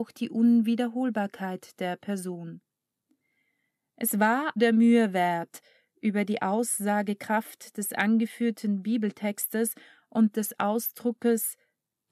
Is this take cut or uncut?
cut